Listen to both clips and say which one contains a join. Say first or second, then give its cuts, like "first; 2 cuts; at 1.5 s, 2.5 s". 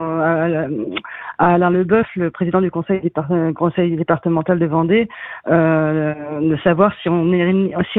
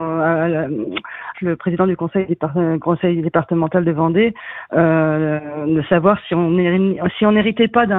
second; 1 cut; at 1.3 s